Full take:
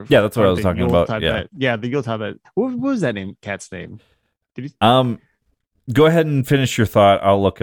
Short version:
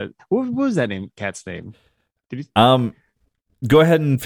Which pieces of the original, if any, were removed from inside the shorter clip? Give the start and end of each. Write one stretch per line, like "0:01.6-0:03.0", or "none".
none